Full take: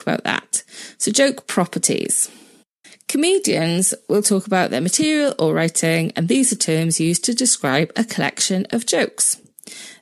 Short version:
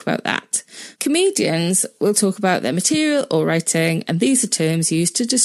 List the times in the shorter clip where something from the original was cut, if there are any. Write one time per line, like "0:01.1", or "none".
0:01.0